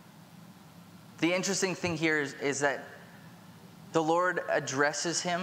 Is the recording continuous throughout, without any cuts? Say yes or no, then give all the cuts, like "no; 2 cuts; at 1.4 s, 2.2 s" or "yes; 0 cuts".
yes; 0 cuts